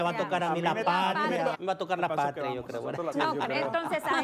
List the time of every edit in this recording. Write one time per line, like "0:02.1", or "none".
0:01.5
0:03.1